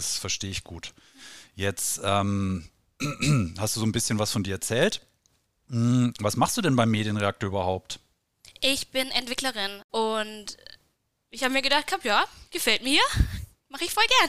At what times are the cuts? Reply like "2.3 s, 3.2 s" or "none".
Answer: 9.9 s